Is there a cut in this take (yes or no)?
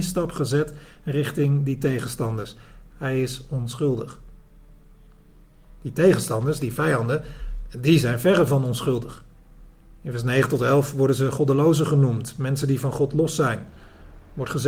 no